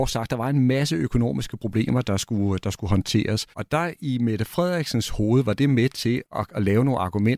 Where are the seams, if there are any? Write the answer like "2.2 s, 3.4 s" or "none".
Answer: 3.5 s, 6.2 s

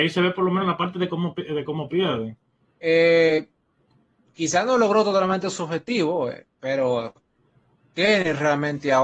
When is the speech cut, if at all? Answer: 2.6 s

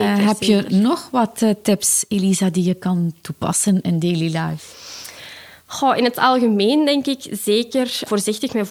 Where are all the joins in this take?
none

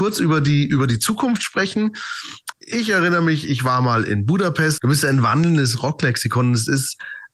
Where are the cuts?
2.5 s, 4.8 s

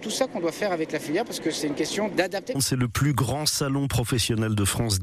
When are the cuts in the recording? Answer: 2.5 s

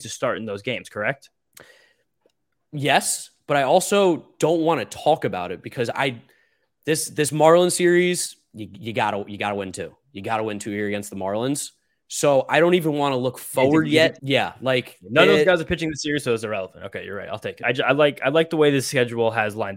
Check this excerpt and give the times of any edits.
14.2 s, 17.6 s

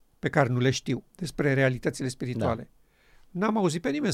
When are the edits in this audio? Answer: 1.1 s

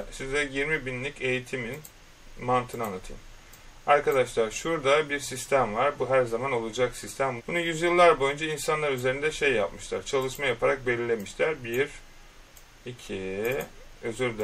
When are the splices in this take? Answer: 7.4 s

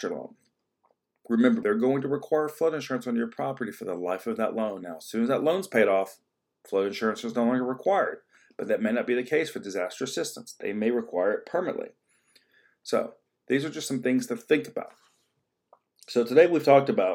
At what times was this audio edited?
1.6 s

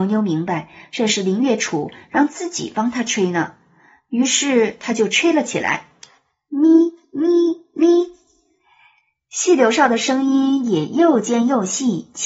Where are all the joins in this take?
none

